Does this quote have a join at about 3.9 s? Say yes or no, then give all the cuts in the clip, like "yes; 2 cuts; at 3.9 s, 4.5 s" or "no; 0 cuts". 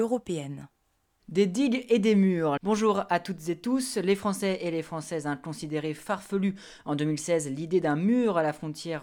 no; 1 cut; at 2.6 s